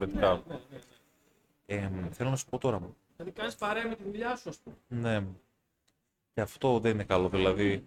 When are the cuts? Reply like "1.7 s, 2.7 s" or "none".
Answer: 3.1 s